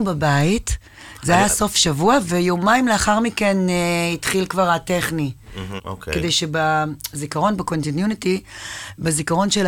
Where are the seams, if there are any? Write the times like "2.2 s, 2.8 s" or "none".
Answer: 5.8 s